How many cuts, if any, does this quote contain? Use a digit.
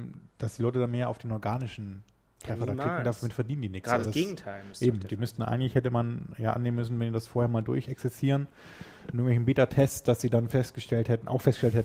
1